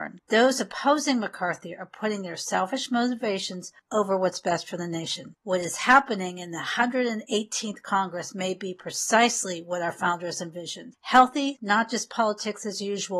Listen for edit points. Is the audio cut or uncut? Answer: cut